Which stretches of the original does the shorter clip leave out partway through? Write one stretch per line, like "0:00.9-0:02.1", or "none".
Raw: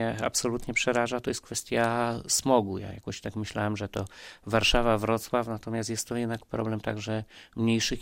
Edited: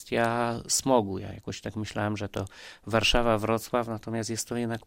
none

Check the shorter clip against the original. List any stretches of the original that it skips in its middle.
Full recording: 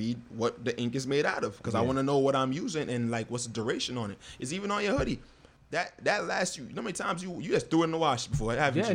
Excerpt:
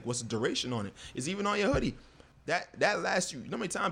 none

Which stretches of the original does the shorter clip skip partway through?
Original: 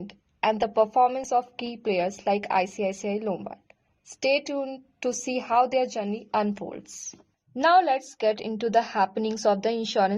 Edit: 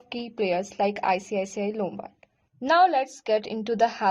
0:04.0-0:07.4

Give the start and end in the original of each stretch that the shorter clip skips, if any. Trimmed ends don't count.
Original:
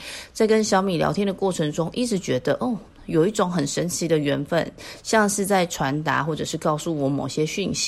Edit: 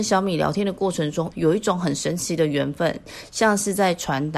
0:01.9-0:03.0

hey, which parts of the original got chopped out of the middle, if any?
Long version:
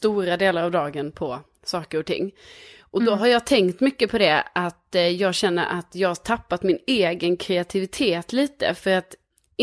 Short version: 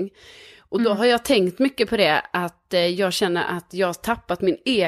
none

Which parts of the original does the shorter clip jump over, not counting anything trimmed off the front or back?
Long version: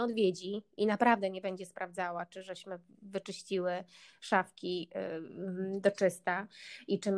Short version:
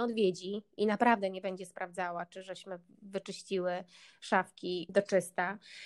0:04.9-0:05.8

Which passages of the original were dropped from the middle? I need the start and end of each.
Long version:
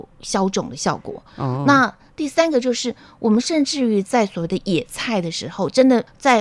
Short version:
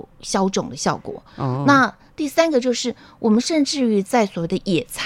none

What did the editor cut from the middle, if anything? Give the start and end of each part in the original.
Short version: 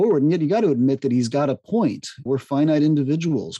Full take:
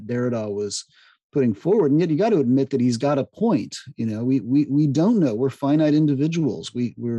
0:03.9-0:05.4

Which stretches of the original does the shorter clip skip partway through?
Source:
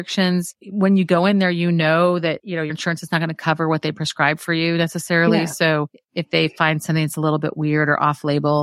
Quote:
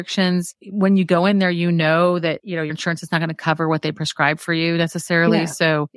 none

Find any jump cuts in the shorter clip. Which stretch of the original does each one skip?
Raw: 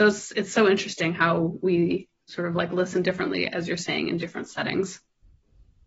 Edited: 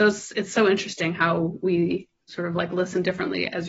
none

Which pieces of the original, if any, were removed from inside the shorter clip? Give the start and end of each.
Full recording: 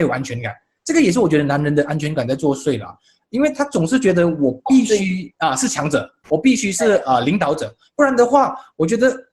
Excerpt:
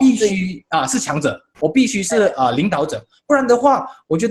none

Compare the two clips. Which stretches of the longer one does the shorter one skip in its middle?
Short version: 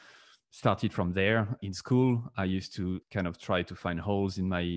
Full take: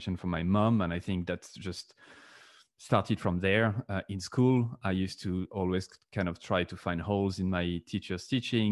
0:03.9-0:04.1
0:05.5-0:06.0

